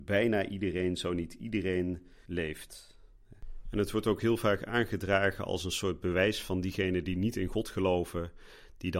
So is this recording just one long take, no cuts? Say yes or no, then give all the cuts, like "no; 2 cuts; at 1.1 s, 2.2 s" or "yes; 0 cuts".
no; 1 cut; at 2.2 s